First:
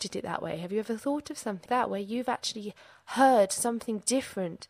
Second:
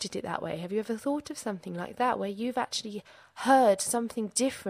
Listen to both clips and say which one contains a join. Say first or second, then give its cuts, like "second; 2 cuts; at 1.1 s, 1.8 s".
first; 1 cut; at 1.7 s